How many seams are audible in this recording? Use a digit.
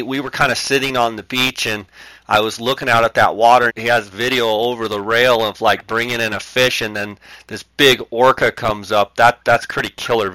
1